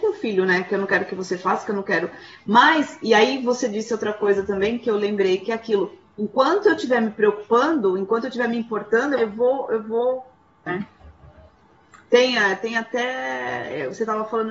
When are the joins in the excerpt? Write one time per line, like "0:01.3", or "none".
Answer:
0:09.2
0:10.7